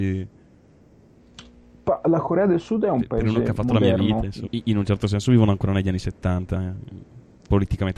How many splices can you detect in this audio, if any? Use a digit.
1